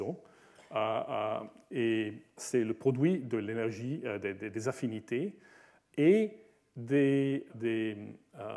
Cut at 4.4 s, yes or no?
no